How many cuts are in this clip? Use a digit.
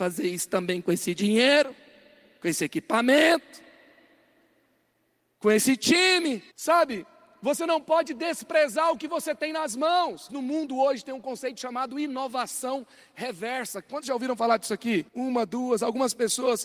3